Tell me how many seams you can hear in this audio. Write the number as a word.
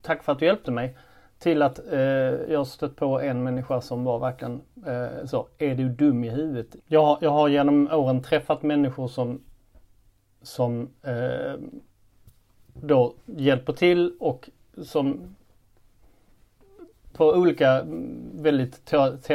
two